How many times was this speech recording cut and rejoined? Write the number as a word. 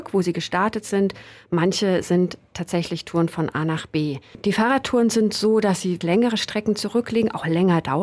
zero